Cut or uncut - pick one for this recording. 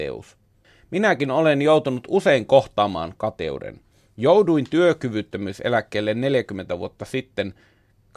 uncut